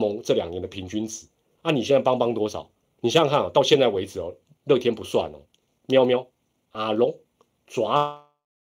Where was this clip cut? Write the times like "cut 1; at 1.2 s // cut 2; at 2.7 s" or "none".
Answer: cut 1; at 3.0 s